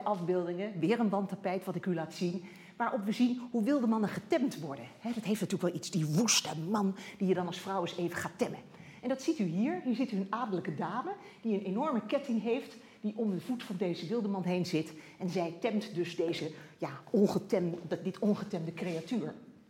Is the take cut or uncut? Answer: uncut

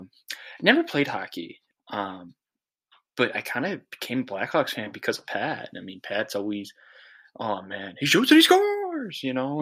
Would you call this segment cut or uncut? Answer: cut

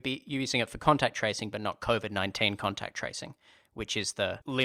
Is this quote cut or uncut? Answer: uncut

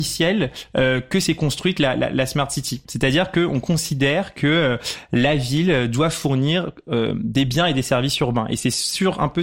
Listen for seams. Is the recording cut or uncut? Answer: cut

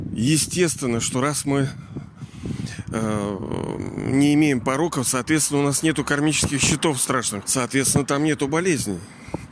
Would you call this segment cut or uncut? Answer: cut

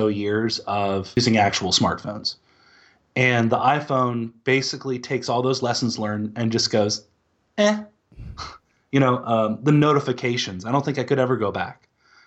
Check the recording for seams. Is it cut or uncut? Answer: uncut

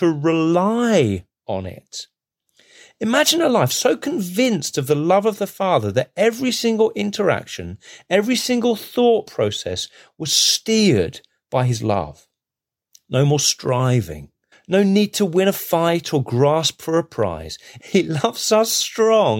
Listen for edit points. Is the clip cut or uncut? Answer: cut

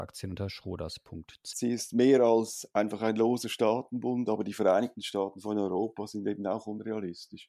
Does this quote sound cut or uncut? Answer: cut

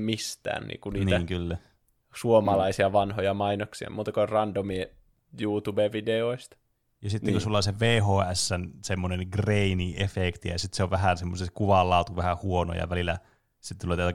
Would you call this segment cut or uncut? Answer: uncut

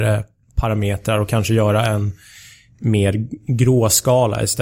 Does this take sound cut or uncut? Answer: uncut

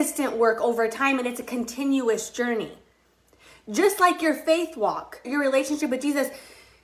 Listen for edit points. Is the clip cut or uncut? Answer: cut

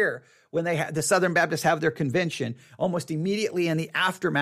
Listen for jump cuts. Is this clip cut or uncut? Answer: uncut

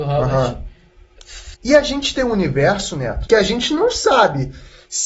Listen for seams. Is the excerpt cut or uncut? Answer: cut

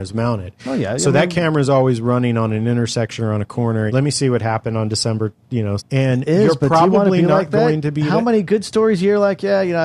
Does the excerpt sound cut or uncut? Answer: cut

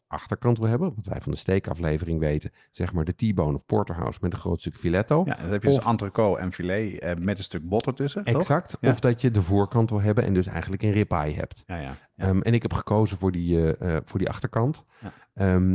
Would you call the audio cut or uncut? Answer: uncut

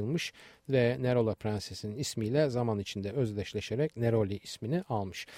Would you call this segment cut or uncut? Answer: uncut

